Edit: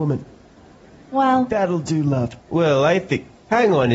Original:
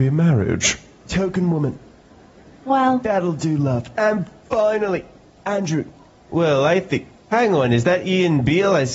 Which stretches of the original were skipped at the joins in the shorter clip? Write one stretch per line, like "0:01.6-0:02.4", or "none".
0:03.9-0:06.2

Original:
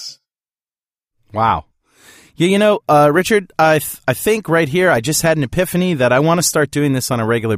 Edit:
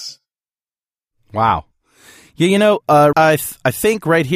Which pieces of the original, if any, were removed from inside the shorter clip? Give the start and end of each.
0:03.1-0:03.6

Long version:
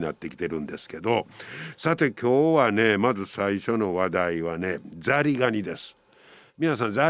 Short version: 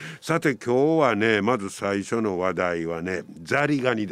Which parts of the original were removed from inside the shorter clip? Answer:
none

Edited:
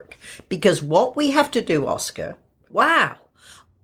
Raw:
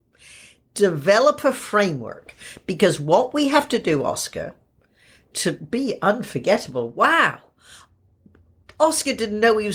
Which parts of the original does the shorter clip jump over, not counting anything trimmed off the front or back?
0:04.9-0:06.9

